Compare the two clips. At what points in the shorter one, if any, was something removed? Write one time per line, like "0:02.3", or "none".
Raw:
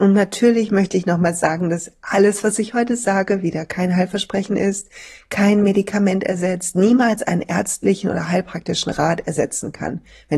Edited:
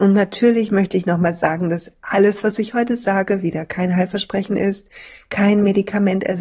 none